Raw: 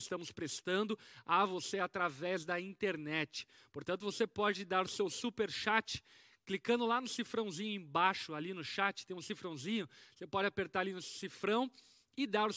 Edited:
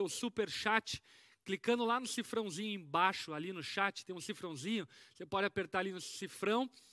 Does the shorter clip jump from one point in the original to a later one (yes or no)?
no